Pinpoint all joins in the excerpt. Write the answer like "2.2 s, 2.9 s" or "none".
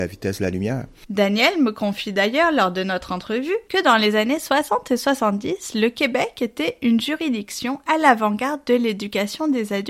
1.1 s, 3.7 s